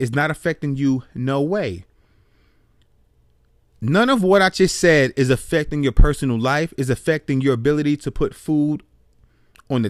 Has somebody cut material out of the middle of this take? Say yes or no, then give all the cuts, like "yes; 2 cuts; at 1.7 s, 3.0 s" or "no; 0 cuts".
no; 0 cuts